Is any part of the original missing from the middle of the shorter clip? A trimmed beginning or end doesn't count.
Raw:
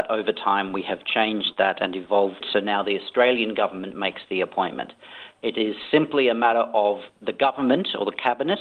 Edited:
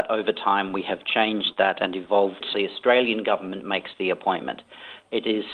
yes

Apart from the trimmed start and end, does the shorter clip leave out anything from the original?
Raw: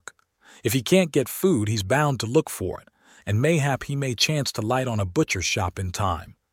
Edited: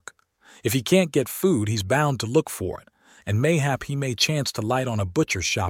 no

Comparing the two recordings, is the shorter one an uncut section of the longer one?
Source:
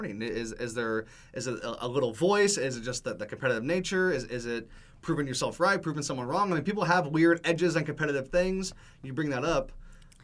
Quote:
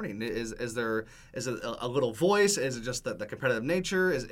yes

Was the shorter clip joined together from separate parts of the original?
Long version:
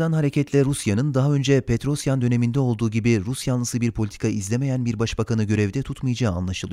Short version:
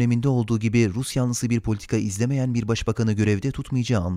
no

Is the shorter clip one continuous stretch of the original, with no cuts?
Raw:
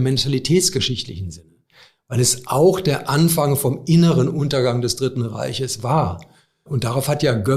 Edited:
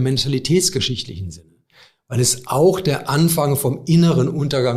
yes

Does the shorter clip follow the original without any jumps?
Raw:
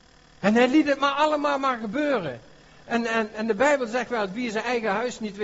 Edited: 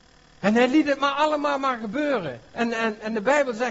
no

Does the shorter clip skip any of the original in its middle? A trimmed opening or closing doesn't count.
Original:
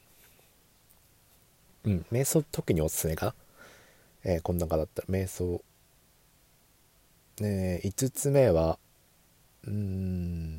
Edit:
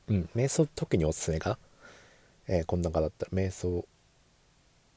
no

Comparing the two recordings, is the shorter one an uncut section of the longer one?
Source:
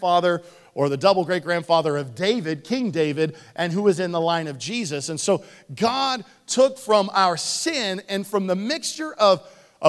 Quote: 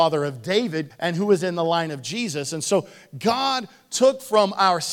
no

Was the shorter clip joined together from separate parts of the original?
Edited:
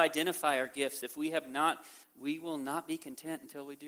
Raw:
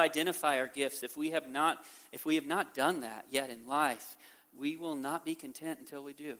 yes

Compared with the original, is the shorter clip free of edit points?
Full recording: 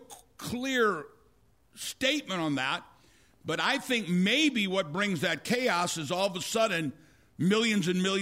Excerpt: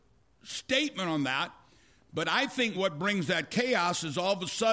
no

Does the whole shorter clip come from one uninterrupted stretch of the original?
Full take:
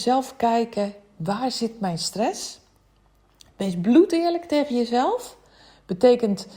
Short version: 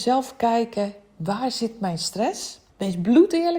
no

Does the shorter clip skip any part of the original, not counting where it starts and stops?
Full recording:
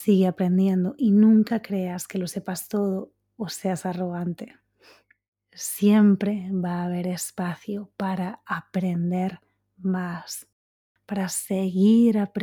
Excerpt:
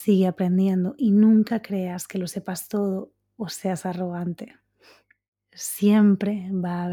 no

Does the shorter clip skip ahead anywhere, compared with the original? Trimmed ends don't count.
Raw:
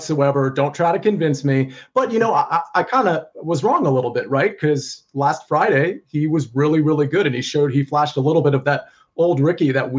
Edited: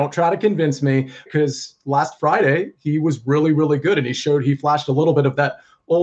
yes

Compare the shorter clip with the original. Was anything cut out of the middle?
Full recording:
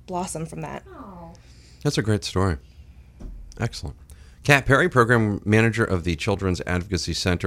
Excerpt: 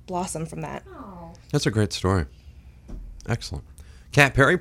yes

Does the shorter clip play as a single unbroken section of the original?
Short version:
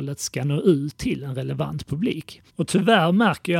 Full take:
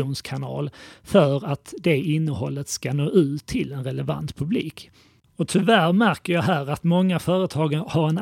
no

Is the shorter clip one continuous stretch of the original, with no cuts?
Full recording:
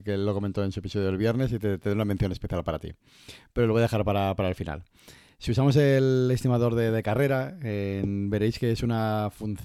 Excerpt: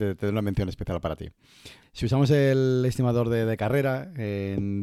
no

